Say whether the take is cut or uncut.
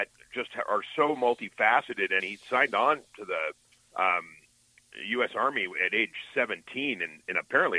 cut